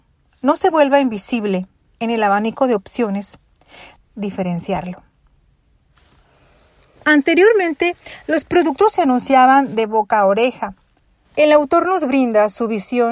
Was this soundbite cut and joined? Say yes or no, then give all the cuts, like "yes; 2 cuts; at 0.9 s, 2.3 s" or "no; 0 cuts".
yes; 3 cuts; at 4.0 s, 7.0 s, 11.3 s